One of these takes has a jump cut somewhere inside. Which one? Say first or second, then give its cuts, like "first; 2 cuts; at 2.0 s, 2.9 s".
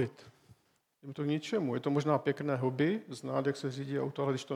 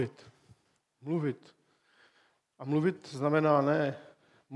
first; 1 cut; at 0.9 s